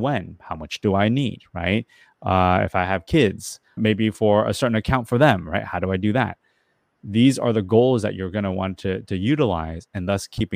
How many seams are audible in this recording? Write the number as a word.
one